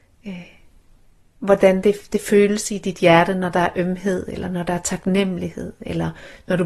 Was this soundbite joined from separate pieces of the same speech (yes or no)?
no